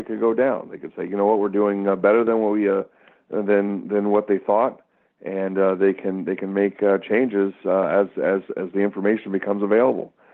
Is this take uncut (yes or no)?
yes